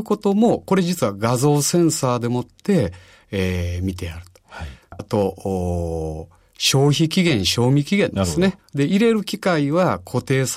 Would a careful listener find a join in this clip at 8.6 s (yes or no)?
yes